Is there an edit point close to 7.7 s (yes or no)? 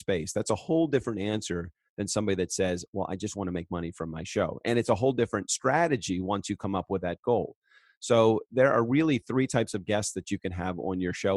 no